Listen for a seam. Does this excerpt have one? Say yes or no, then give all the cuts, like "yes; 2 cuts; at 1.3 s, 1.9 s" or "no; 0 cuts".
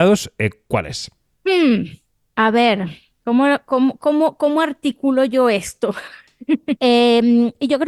yes; 1 cut; at 6.8 s